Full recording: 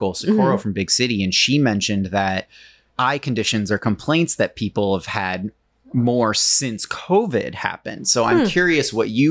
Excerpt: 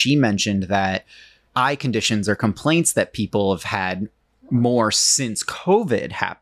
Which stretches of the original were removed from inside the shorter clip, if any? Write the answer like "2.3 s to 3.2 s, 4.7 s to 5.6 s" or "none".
none